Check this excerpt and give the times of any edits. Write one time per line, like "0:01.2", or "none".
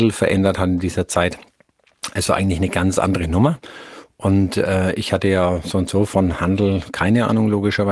none